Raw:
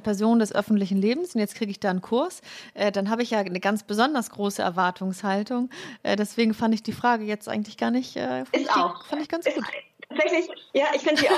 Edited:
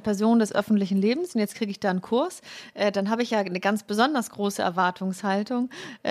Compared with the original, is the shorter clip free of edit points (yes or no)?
yes